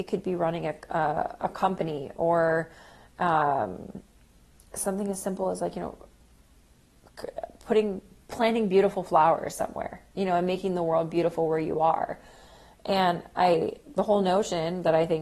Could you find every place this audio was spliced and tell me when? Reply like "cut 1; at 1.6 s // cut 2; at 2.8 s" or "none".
none